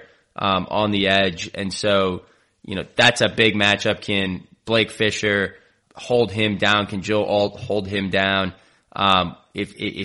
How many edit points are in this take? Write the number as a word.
one